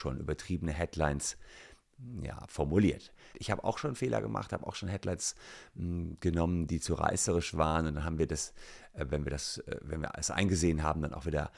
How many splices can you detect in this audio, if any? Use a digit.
1